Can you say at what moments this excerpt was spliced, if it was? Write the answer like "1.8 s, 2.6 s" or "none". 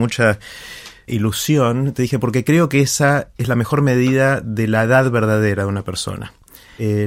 1.1 s